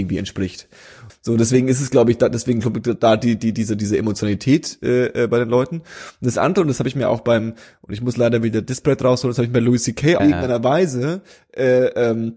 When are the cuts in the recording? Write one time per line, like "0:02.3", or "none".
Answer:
0:01.1
0:10.2